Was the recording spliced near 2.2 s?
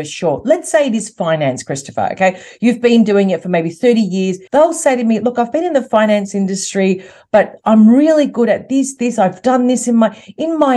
no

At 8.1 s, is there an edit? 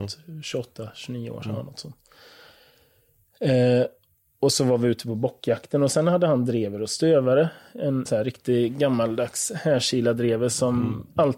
yes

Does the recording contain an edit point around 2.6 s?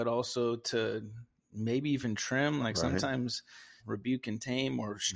yes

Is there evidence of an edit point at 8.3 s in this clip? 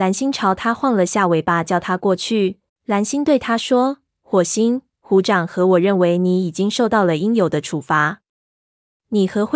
no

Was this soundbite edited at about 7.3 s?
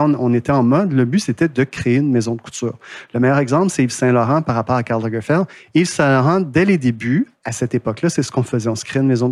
no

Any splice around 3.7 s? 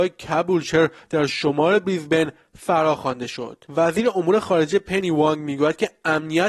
yes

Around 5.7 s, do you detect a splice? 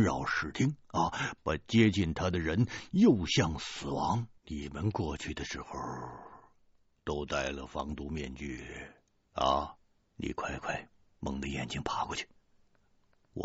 no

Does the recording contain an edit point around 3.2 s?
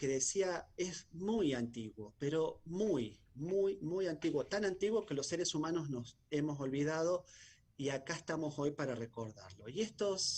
no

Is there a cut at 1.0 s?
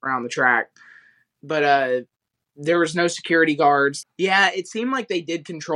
no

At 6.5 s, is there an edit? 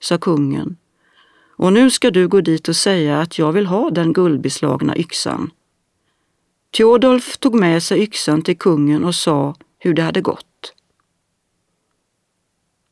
yes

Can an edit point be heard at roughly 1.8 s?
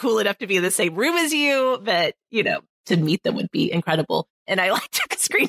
no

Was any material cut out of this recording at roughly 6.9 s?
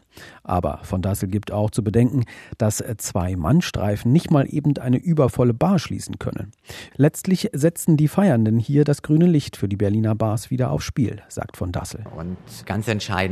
yes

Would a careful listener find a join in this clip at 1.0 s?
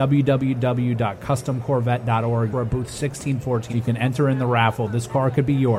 no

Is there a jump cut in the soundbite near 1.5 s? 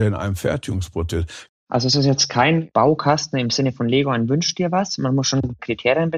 yes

